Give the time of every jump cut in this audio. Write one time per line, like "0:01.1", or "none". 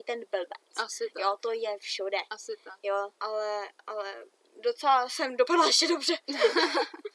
0:03.2